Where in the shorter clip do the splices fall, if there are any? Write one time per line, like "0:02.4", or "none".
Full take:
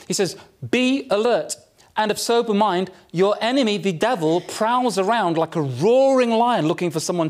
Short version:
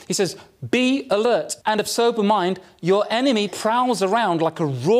0:01.6
0:03.5